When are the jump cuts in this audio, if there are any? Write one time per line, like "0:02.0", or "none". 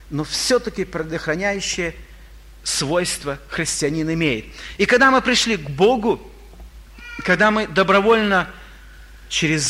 none